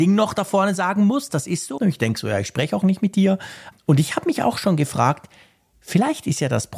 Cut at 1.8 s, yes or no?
yes